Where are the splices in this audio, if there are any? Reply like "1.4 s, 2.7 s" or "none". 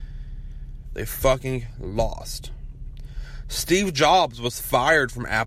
1.0 s